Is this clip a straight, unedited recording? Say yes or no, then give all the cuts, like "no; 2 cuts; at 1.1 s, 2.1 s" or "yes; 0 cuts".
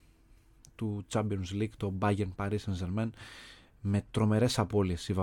yes; 0 cuts